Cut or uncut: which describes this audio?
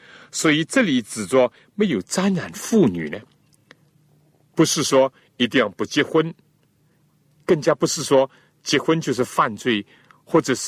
uncut